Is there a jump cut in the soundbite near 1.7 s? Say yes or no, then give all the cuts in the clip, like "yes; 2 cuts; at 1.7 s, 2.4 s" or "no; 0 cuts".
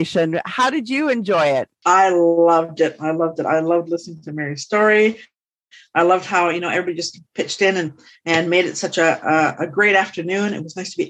yes; 1 cut; at 1.7 s